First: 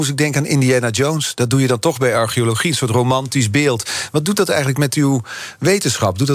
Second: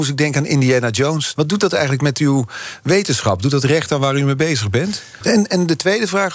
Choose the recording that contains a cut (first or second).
second